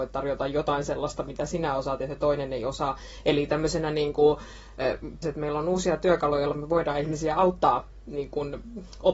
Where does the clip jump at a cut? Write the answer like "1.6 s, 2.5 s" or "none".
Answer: 5.2 s